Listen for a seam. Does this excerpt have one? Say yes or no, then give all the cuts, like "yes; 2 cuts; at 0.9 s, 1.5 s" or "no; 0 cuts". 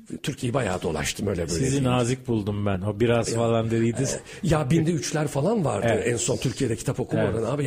no; 0 cuts